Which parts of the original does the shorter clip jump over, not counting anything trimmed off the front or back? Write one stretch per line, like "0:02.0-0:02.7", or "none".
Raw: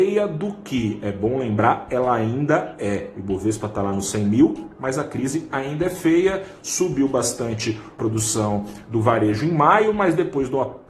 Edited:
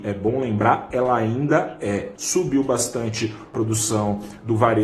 0:03.1-0:06.6